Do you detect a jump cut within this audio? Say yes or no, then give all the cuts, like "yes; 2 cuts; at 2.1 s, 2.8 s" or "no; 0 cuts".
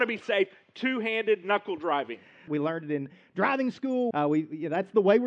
yes; 2 cuts; at 2.5 s, 4.1 s